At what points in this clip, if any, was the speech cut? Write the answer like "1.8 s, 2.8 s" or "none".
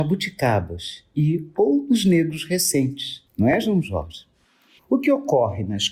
4.8 s